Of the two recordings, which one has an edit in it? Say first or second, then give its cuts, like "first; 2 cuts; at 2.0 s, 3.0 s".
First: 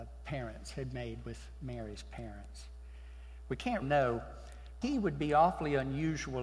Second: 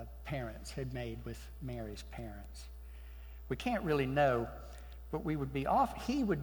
first; 2 cuts; at 3.8 s, 4.8 s